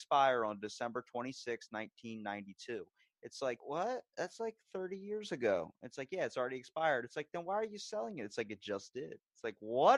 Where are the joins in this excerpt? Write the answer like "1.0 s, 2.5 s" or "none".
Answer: 3.6 s